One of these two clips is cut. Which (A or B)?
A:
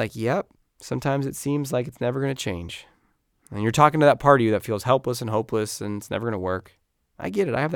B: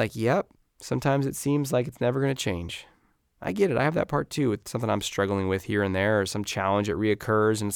B